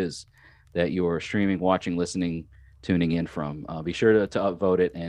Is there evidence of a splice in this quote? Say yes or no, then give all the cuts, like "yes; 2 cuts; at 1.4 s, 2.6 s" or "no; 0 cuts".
no; 0 cuts